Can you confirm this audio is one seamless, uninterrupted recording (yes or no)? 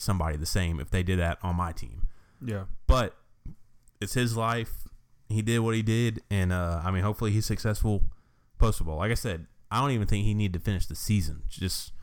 yes